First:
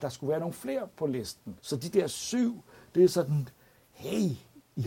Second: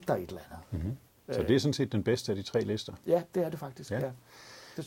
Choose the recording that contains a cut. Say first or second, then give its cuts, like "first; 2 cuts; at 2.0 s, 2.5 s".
first; 1 cut; at 1.6 s